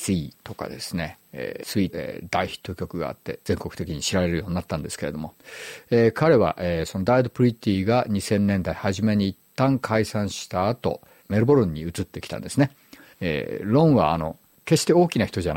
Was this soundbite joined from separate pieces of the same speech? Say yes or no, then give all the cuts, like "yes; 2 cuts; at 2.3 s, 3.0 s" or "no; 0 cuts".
yes; 2 cuts; at 1.9 s, 13.1 s